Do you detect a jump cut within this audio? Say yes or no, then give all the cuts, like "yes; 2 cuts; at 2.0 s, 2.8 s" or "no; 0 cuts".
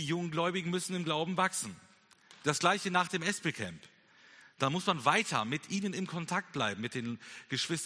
no; 0 cuts